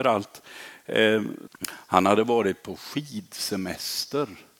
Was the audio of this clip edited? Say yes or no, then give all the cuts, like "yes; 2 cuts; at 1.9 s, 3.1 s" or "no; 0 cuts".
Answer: yes; 1 cut; at 1.5 s